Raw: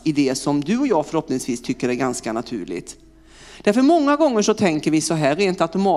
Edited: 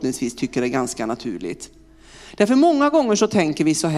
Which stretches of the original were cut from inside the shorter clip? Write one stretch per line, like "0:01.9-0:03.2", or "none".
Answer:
none